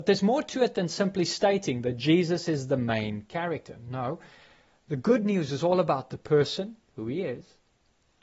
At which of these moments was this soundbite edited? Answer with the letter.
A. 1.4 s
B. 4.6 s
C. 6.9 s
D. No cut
D